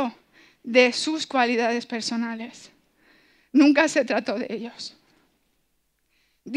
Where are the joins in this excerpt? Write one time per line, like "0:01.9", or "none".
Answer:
none